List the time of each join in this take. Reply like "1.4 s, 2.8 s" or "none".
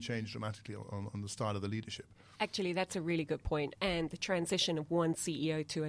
3.7 s

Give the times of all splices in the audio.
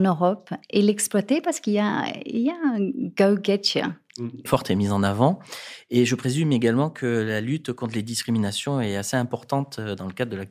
4.5 s

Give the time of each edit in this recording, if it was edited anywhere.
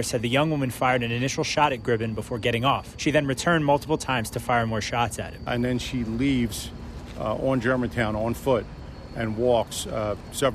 none

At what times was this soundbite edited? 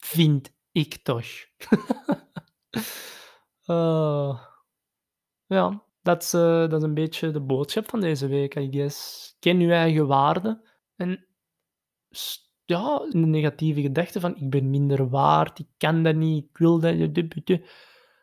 5.9 s, 10.8 s, 13.1 s

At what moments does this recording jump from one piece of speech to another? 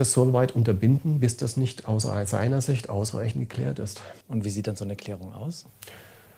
4.2 s

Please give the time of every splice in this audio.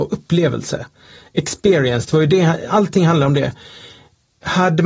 none

